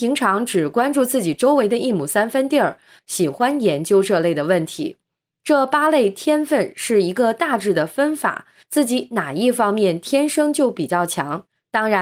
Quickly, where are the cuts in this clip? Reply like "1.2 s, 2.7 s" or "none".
3.0 s, 8.6 s